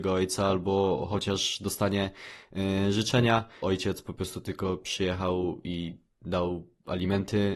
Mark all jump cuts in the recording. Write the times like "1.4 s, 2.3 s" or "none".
3.6 s